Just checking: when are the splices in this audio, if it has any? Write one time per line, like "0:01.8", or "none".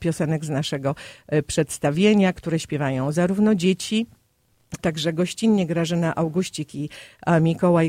0:04.8